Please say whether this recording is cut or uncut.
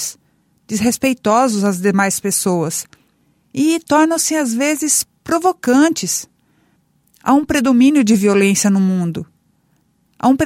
uncut